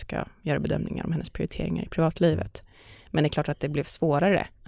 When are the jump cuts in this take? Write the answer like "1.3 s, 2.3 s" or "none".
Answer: none